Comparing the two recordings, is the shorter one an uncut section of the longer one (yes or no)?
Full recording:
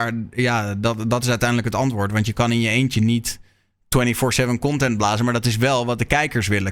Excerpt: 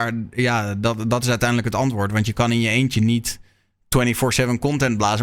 yes